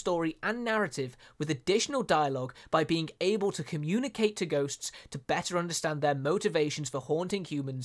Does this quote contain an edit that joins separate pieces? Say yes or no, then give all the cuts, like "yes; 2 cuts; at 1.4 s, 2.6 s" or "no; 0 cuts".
no; 0 cuts